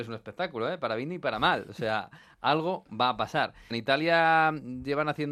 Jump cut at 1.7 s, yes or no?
no